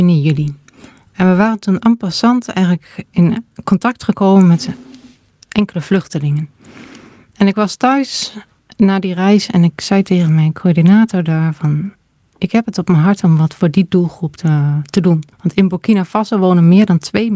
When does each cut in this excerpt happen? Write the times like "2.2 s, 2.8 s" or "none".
15.3 s